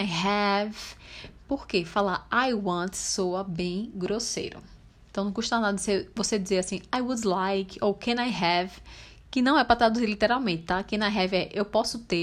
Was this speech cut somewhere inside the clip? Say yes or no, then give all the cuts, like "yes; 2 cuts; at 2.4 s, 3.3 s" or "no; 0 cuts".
no; 0 cuts